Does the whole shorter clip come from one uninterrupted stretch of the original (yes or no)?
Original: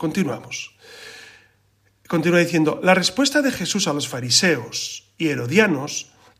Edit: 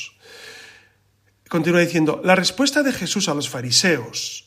yes